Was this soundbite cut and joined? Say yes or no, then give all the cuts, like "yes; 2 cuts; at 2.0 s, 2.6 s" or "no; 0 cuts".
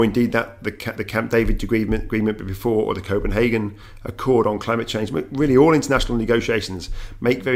no; 0 cuts